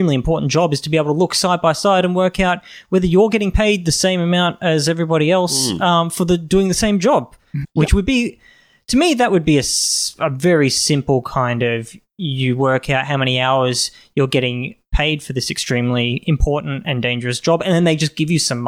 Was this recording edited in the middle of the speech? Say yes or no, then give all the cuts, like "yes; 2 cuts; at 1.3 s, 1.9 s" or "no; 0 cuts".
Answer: yes; 1 cut; at 7.6 s